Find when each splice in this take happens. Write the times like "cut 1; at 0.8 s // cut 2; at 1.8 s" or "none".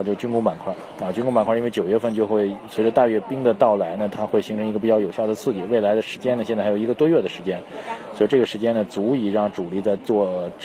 none